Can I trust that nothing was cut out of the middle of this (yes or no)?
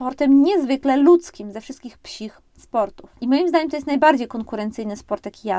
no